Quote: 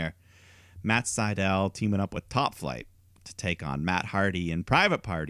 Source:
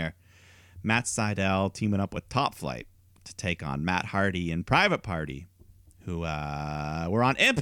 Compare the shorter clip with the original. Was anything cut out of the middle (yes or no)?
no